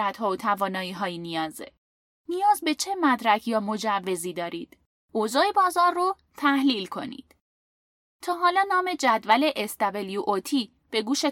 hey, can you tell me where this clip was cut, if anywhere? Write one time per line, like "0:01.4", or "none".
0:05.0